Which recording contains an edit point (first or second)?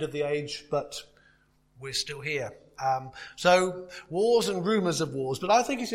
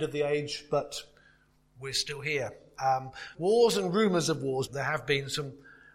second